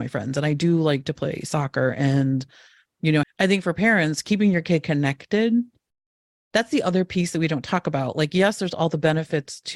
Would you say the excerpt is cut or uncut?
cut